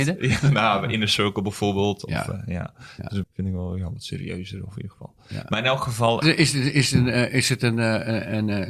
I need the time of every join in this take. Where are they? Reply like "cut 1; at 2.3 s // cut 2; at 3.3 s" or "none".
cut 1; at 3.2 s // cut 2; at 6.2 s